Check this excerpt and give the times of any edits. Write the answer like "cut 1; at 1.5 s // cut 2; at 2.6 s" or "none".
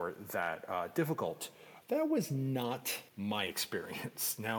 cut 1; at 1.8 s // cut 2; at 3.1 s

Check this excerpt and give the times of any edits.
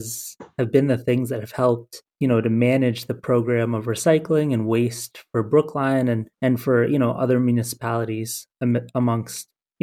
cut 1; at 2.1 s // cut 2; at 6.3 s // cut 3; at 8.5 s

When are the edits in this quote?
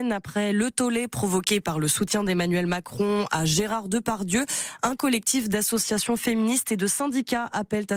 none

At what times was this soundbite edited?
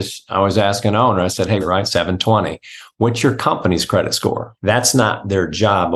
cut 1; at 1.6 s // cut 2; at 4.6 s

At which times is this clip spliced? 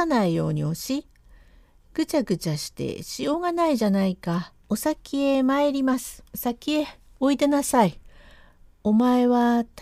cut 1; at 4.6 s // cut 2; at 6.3 s

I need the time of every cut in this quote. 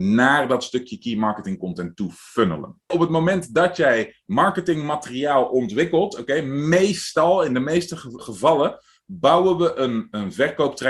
cut 1; at 2.9 s // cut 2; at 8.2 s

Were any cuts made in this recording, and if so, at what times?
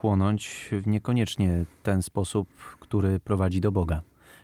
none

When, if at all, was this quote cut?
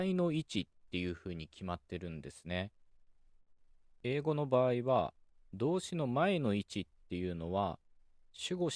cut 1; at 4.0 s

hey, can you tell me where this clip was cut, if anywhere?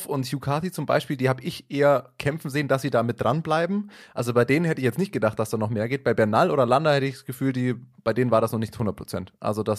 none

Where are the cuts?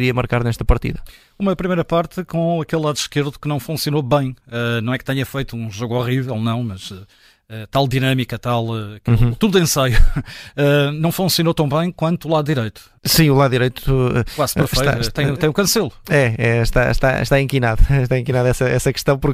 cut 1; at 13.0 s

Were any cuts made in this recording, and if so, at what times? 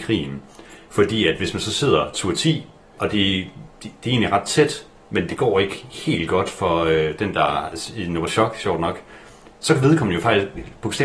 cut 1; at 2.9 s

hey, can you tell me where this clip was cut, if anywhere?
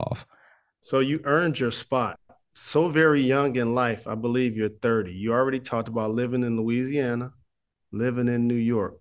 cut 1; at 7.8 s

